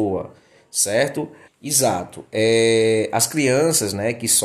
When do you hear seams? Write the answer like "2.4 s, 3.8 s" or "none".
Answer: 1.4 s